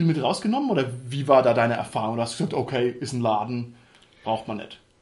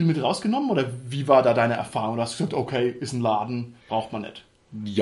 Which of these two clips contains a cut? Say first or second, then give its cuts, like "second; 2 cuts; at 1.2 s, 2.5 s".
second; 1 cut; at 3.8 s